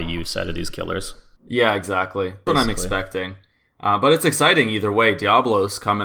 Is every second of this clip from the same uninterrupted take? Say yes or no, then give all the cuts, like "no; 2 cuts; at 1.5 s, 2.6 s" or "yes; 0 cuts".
no; 1 cut; at 2.5 s